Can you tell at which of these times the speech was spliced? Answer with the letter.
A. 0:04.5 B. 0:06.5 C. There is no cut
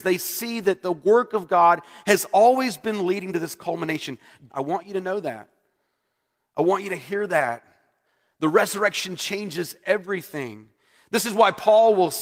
A